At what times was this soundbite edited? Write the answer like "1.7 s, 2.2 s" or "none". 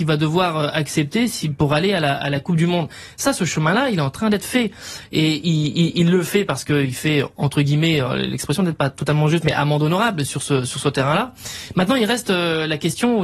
none